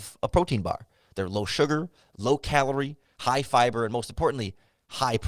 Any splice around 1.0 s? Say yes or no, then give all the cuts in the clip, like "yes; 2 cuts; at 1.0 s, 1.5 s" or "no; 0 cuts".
no; 0 cuts